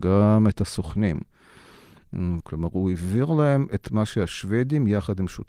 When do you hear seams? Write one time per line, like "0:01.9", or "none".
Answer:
0:02.4